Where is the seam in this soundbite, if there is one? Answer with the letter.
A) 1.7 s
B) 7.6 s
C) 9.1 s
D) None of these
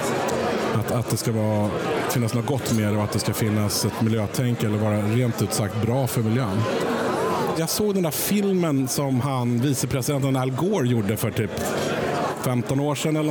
B